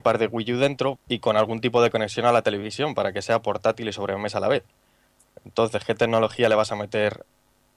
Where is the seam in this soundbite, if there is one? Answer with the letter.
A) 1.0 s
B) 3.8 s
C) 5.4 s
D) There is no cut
A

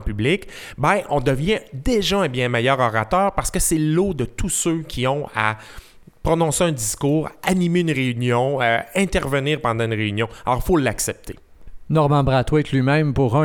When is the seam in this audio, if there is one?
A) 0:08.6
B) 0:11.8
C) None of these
C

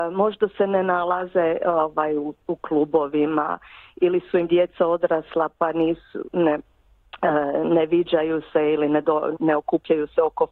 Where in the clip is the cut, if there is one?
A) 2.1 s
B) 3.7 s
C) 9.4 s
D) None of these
C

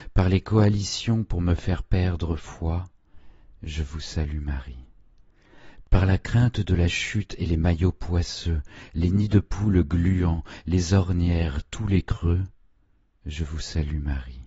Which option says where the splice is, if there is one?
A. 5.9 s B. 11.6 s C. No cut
A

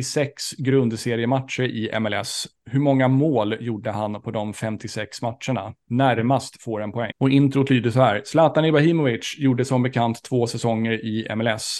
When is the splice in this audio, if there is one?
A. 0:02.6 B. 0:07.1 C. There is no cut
B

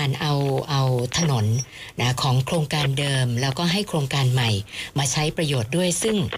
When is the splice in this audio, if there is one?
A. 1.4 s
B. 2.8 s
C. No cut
C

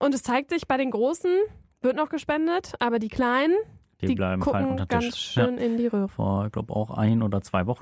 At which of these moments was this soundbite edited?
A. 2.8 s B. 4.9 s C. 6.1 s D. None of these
C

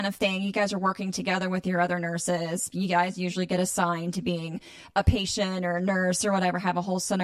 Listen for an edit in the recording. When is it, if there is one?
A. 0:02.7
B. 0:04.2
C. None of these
C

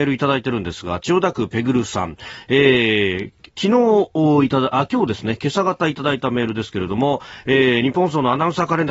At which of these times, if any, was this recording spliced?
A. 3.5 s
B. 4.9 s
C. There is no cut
A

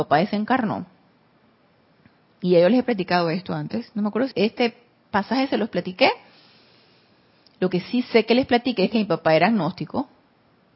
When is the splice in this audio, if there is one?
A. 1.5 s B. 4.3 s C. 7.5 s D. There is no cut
B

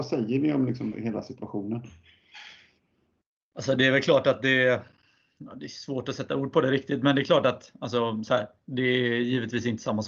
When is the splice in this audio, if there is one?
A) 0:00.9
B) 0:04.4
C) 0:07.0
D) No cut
A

